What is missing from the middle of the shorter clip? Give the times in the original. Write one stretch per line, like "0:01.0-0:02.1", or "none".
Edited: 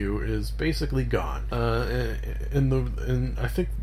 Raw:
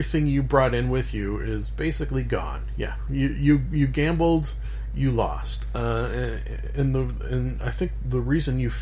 0:02.7-0:05.7